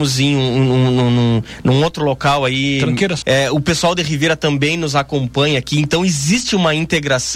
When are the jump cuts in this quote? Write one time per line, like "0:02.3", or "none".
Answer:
0:03.2